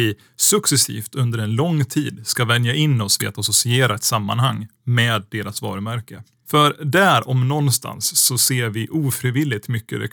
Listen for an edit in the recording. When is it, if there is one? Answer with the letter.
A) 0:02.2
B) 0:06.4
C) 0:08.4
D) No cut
B